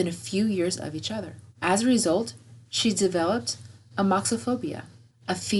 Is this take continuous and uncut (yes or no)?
no